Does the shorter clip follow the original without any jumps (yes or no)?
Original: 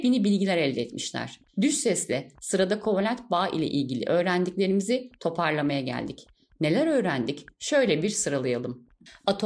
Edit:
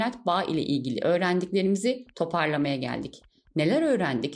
yes